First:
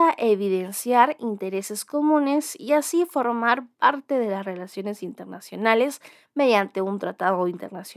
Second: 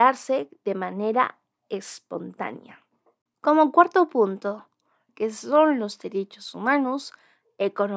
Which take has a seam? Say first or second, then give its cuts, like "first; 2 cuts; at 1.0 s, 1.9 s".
second; 2 cuts; at 3.3 s, 5.1 s